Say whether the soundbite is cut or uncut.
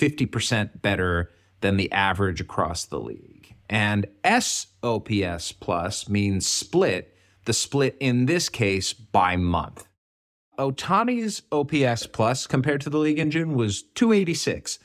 uncut